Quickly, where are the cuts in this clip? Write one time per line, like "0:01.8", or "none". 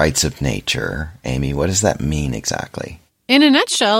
0:03.1